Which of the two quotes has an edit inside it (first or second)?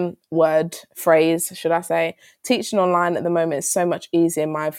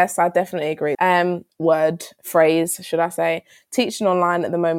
second